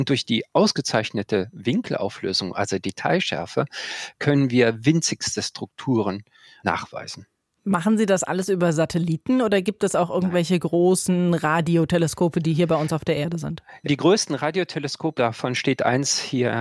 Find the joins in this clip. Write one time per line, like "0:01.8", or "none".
0:13.8
0:15.2